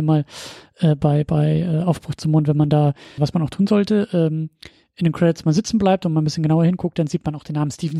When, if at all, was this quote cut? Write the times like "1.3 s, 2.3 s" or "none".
3.2 s